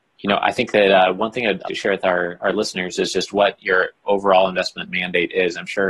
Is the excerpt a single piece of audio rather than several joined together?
no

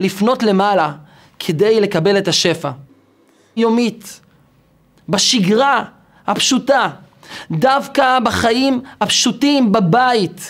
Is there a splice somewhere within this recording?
yes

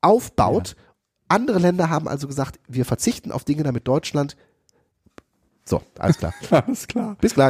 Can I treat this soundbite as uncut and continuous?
yes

